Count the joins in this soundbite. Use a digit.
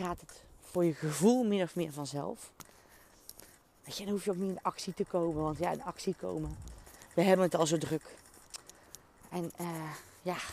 0